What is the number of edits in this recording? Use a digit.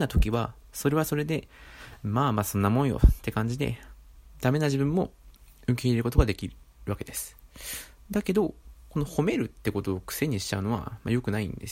0